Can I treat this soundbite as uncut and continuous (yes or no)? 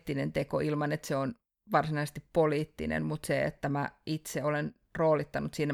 yes